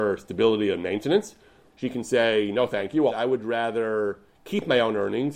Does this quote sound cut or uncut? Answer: cut